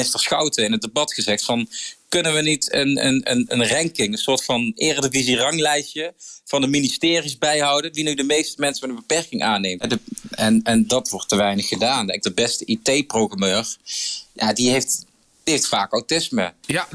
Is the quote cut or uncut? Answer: cut